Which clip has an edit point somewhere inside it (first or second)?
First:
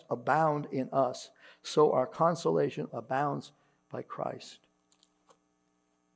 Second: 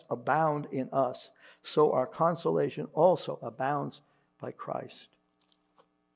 first